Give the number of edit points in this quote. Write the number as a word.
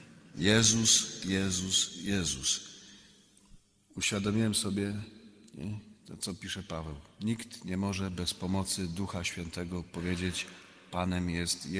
zero